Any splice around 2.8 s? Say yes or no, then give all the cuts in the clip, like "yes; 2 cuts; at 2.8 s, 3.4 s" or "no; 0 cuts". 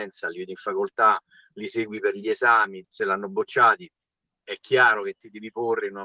yes; 1 cut; at 2.8 s